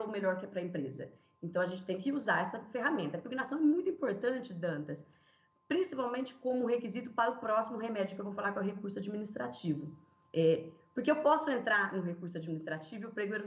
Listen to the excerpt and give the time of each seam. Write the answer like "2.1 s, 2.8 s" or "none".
none